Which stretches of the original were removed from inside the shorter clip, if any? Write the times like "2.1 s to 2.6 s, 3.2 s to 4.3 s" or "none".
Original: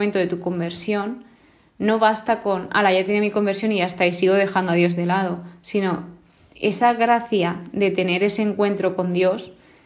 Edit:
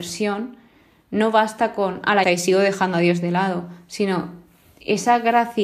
2.9 s to 4.0 s